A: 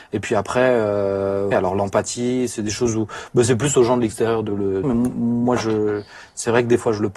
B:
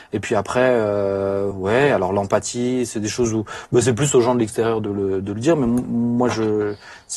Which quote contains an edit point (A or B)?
A